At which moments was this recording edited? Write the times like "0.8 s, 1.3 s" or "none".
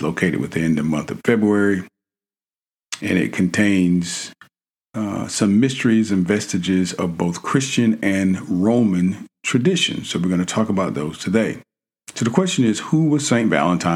none